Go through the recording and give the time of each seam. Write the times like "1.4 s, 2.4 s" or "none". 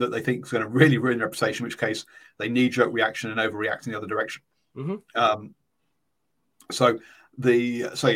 none